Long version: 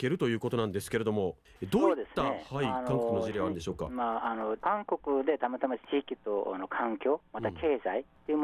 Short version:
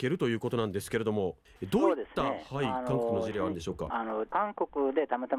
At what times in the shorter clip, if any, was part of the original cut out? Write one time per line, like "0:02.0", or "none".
0:03.9